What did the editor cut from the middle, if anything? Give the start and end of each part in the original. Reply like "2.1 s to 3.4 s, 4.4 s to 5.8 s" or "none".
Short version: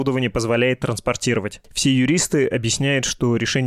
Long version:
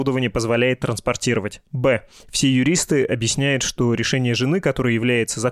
1.6 s to 2.2 s